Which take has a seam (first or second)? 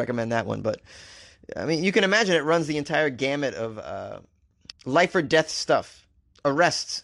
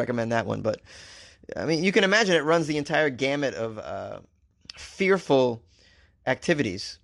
first